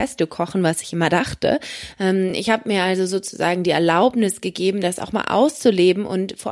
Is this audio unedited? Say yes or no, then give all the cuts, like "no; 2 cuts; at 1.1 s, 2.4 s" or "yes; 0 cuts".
yes; 0 cuts